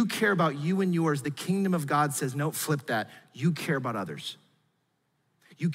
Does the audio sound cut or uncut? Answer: uncut